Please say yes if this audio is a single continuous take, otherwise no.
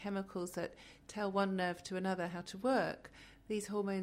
yes